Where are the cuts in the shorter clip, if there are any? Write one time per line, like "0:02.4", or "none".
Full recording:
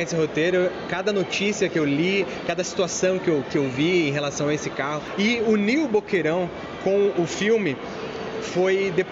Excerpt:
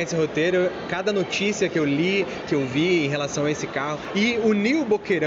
0:02.4

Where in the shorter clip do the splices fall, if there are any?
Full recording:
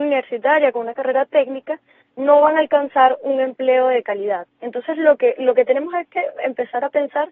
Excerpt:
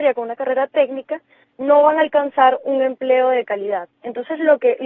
none

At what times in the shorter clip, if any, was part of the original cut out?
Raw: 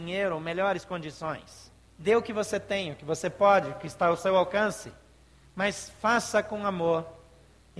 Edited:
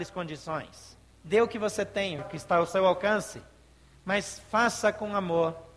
0:02.2

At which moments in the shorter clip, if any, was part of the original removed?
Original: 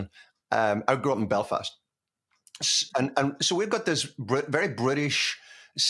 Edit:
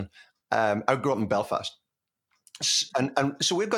none

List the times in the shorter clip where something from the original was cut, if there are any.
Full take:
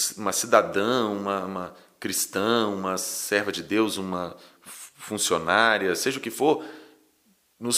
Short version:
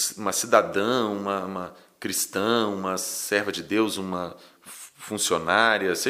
none

